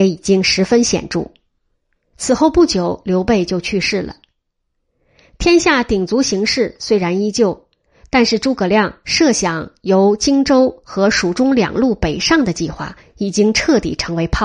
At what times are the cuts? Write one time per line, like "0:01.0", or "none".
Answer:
0:02.1